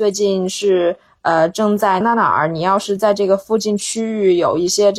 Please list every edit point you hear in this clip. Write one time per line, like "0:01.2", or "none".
0:02.0

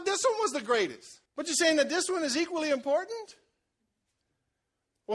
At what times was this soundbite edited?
0:01.3

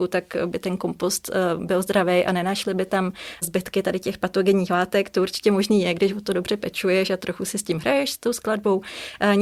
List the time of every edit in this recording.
none

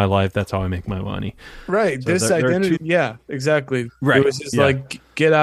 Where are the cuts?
0:02.8
0:03.9

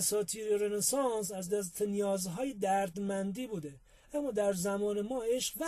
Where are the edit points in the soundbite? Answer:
none

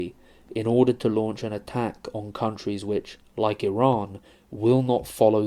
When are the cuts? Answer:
none

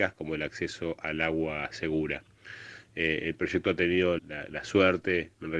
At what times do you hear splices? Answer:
0:04.2

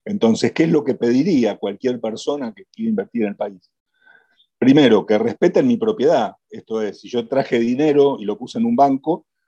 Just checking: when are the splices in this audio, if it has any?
none

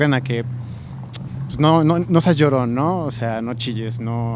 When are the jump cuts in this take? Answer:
none

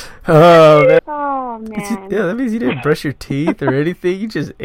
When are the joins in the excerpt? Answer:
0:01.0

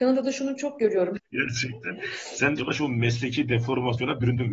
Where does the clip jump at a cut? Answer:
0:01.2
0:02.6

